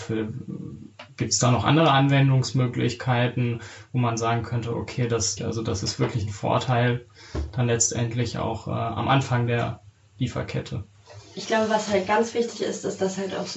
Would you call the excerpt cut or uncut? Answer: cut